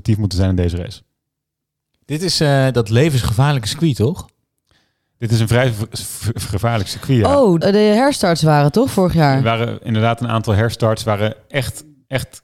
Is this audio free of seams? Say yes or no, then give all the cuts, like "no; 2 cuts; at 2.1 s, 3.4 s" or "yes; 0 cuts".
no; 1 cut; at 7.6 s